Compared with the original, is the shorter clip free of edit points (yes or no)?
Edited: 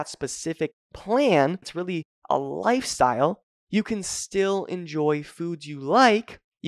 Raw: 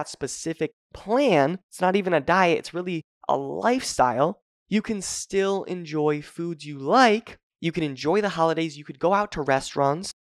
no